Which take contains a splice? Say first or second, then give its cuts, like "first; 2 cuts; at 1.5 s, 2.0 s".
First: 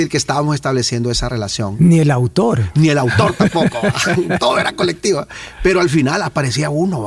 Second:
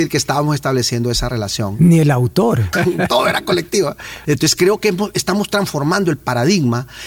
second; 2 cuts; at 2.7 s, 4.2 s